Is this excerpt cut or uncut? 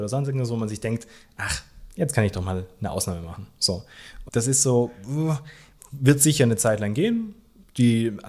cut